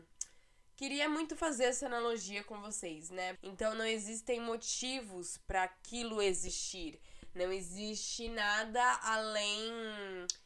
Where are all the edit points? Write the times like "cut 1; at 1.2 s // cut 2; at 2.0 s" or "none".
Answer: cut 1; at 3.4 s

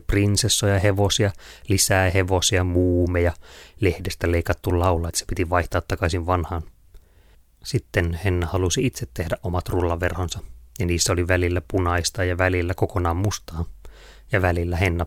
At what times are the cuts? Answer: cut 1; at 5.1 s

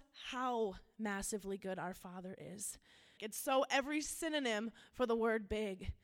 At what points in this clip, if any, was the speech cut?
cut 1; at 3.2 s

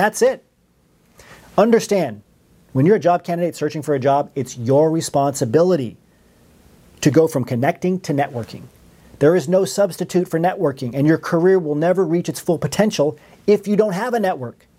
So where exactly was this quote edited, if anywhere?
none

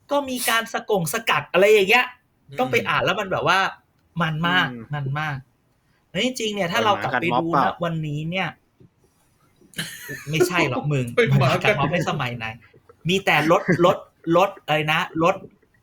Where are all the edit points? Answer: none

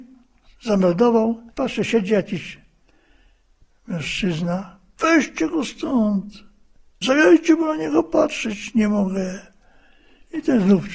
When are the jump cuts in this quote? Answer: cut 1; at 1.5 s // cut 2; at 5.0 s // cut 3; at 7.0 s

